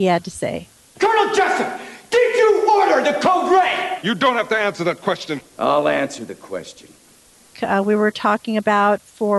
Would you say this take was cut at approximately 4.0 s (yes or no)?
no